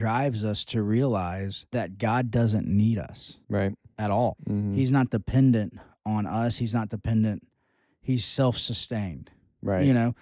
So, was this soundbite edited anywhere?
yes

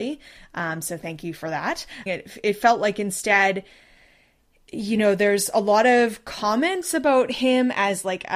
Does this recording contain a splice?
yes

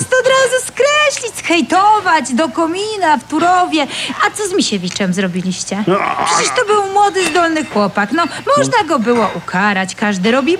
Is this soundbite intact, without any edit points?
yes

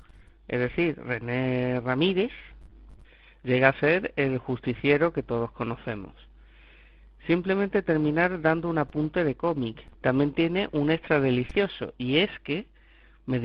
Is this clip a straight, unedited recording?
no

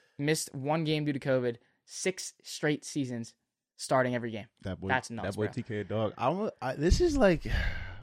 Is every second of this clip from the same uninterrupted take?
yes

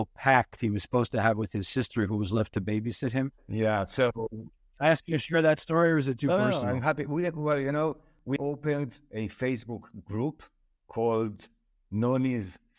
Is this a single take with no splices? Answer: no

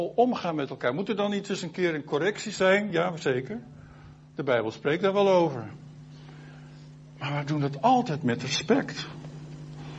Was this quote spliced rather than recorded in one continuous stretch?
no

